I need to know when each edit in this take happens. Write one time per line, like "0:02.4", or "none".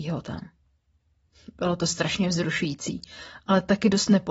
none